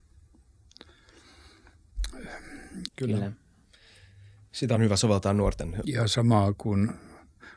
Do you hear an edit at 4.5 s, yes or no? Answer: no